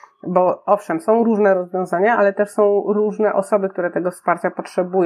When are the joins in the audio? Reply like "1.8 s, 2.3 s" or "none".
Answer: none